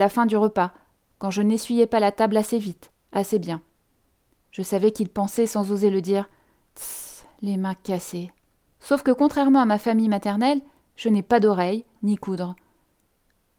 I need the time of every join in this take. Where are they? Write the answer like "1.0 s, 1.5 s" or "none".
8.7 s, 12.0 s

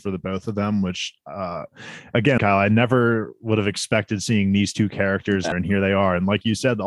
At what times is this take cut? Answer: 2.4 s, 5.5 s

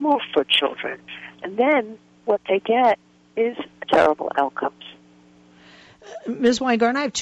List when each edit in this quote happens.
1.4 s, 3.9 s

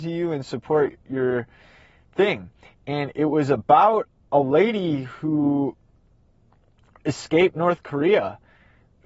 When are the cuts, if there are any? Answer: 2.6 s

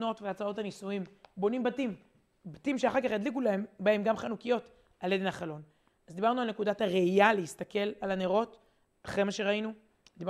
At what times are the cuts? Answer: none

